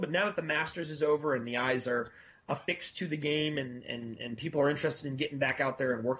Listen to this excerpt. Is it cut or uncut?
uncut